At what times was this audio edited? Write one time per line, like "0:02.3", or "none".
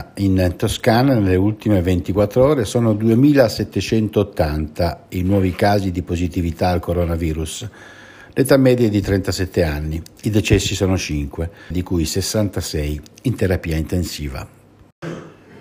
0:11.7